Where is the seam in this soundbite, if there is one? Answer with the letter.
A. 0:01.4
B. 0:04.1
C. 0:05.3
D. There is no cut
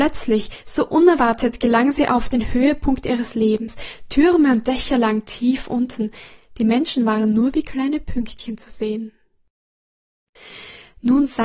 D